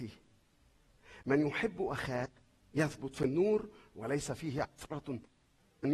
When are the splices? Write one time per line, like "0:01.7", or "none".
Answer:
none